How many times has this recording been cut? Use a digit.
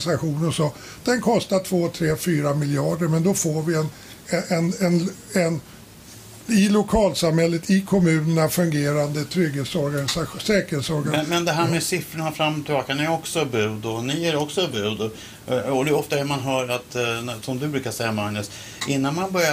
0